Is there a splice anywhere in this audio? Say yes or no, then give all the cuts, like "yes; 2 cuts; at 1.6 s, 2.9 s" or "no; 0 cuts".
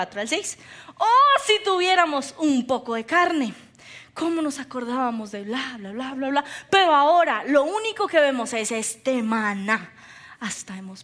no; 0 cuts